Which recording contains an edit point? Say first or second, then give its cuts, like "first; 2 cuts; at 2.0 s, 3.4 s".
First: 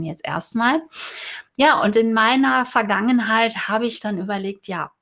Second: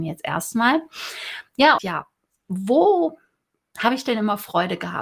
second; 1 cut; at 1.8 s